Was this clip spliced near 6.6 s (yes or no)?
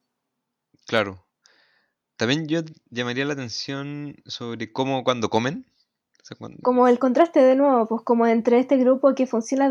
yes